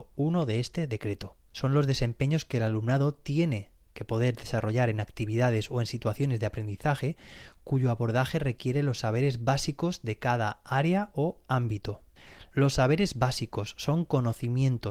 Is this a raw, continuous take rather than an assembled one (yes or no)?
no